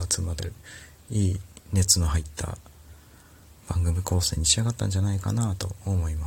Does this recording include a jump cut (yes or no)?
no